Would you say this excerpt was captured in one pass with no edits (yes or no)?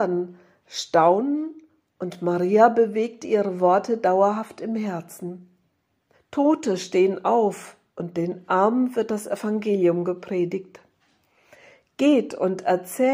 no